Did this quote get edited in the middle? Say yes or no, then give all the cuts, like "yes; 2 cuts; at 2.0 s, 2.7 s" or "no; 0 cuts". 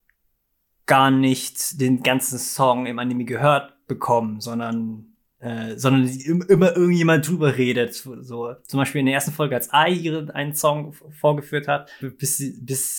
yes; 1 cut; at 12.0 s